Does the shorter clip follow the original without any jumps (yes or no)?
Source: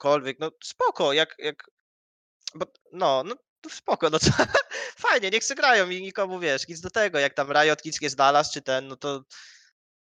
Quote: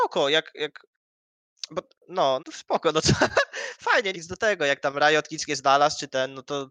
no